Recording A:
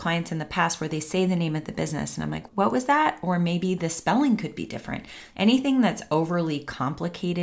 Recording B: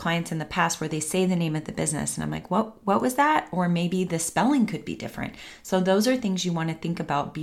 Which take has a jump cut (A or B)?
A